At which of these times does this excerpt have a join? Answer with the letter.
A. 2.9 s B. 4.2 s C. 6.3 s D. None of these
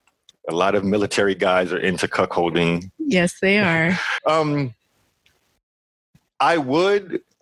B